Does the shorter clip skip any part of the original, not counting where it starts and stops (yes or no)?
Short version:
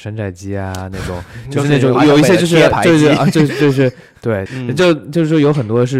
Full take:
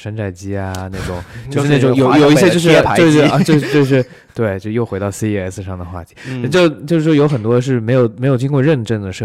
yes